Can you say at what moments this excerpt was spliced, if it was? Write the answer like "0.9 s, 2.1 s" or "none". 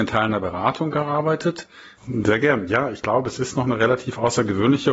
2.0 s